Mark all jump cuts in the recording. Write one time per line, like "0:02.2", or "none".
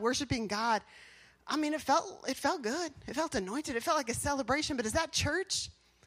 none